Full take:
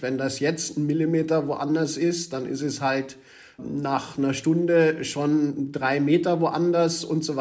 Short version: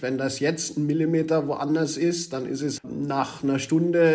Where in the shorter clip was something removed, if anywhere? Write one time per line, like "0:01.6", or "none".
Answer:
0:02.8